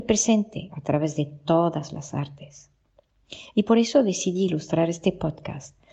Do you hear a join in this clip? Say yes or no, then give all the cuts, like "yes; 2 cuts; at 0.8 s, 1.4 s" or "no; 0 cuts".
no; 0 cuts